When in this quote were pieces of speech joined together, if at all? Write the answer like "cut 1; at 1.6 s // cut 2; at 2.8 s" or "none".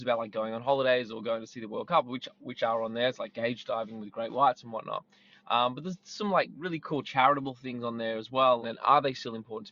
cut 1; at 8.6 s